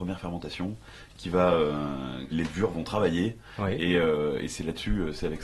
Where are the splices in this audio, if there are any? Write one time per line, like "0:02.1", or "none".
0:02.3